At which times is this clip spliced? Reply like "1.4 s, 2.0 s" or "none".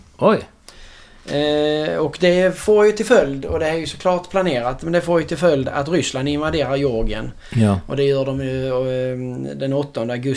none